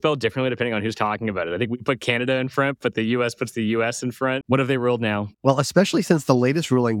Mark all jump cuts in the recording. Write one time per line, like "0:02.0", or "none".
0:04.4